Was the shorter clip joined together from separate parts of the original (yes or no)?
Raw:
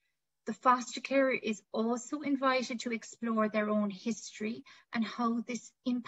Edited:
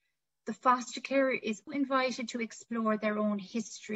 yes